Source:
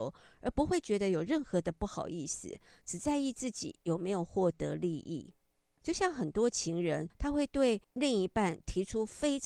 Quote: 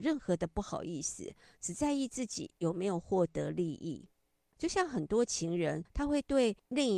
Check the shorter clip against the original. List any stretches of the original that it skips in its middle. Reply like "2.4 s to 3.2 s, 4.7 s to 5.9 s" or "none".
none